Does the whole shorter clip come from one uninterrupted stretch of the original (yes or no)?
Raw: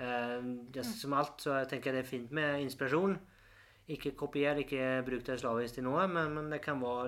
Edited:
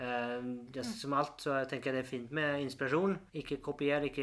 no